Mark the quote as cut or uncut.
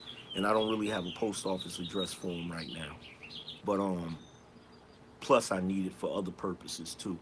cut